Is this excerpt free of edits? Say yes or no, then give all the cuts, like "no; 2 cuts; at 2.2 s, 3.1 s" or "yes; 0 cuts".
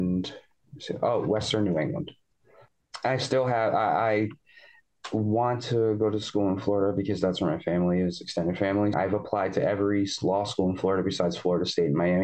no; 1 cut; at 8.9 s